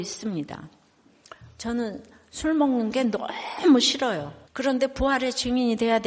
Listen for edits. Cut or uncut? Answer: cut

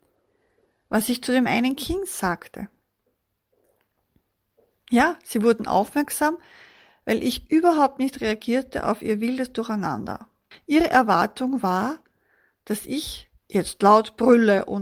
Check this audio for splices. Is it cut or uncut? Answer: cut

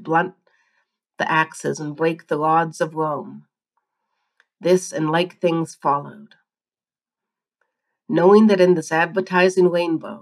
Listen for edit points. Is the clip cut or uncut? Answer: uncut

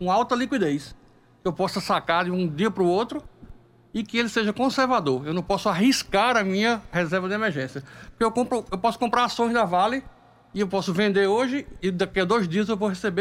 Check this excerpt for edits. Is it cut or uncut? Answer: cut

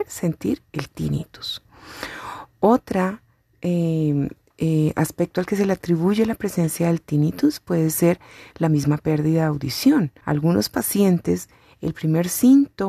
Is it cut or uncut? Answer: cut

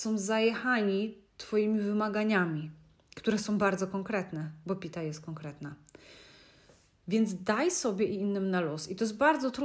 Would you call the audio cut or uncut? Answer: uncut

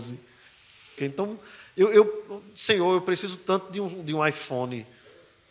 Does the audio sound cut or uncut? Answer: cut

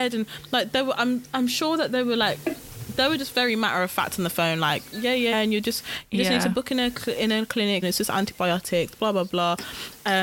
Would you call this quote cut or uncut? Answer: cut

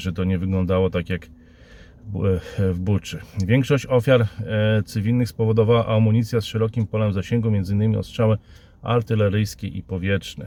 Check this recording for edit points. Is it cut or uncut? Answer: uncut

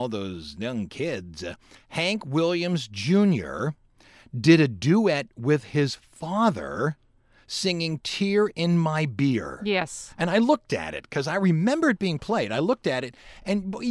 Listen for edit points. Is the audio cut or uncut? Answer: uncut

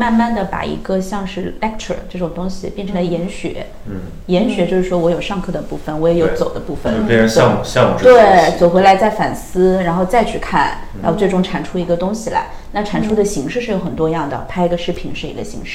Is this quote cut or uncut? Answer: uncut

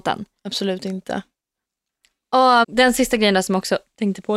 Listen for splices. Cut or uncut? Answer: cut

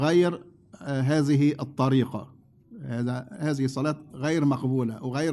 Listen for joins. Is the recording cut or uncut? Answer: uncut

